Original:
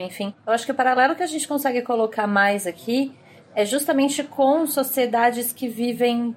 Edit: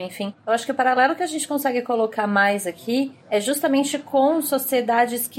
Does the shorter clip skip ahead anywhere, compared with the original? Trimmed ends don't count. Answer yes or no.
yes